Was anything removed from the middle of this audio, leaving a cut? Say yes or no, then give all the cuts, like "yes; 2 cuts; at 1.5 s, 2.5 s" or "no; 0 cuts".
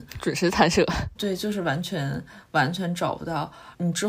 no; 0 cuts